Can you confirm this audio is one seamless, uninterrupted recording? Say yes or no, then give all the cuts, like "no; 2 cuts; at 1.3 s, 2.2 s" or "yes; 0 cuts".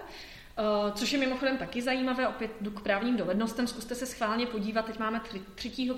yes; 0 cuts